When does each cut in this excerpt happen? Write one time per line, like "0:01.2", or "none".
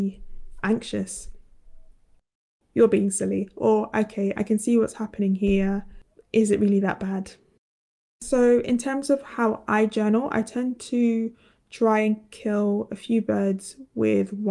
0:02.6